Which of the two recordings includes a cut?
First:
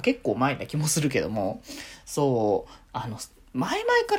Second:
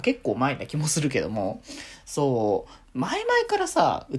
second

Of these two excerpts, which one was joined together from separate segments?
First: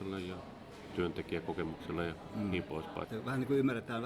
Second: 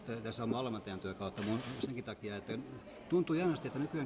first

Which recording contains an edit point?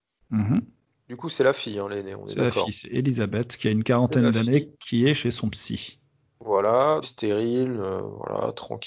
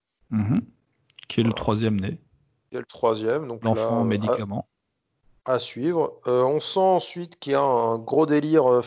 first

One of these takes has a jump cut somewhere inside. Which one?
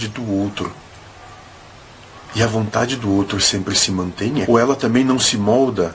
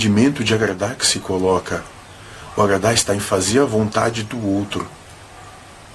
first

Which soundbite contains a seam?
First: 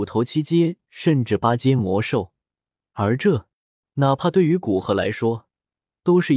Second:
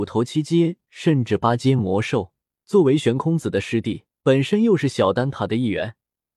second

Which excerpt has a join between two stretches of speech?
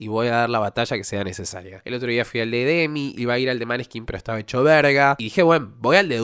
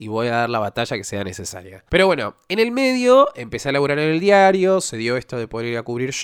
first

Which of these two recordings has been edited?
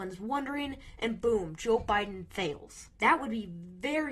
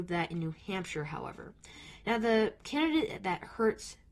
first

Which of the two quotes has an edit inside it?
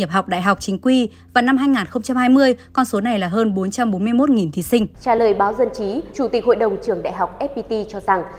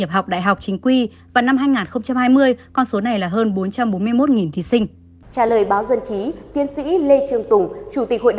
first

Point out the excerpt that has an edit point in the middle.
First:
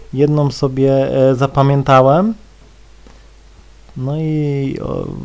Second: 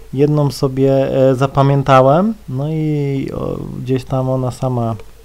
second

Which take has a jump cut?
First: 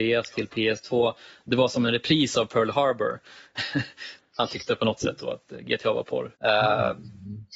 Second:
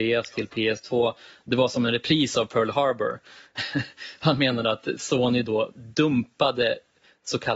first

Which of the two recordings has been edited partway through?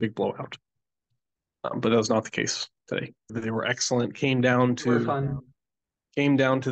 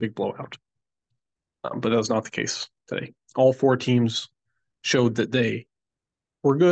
first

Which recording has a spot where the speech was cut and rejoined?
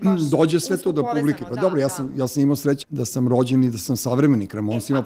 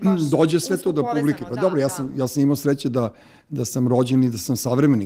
first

